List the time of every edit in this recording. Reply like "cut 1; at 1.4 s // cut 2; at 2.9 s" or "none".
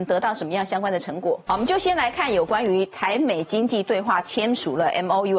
cut 1; at 1.5 s